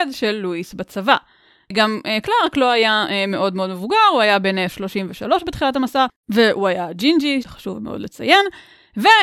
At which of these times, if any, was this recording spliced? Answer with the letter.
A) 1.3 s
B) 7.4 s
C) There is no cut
B